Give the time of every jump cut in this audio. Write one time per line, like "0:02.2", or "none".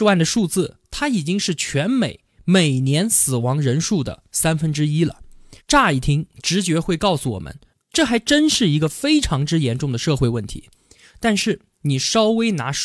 0:05.6